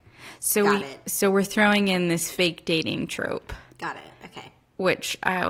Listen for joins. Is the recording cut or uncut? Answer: uncut